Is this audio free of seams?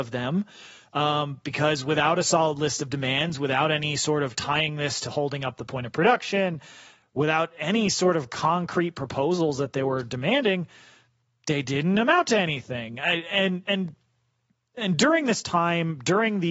yes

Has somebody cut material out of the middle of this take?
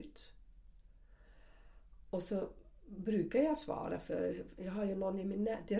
no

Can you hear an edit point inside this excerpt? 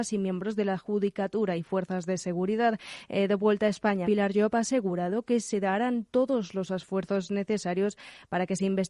yes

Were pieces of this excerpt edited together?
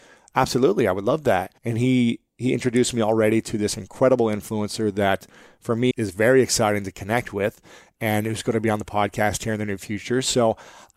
yes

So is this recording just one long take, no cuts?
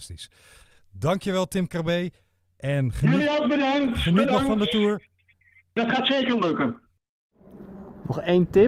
yes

